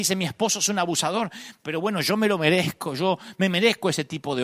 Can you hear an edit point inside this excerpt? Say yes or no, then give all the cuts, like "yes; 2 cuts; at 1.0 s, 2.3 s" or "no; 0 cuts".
no; 0 cuts